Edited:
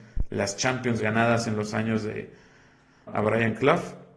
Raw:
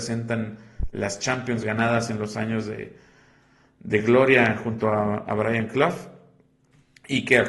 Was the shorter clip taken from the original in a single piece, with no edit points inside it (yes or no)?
no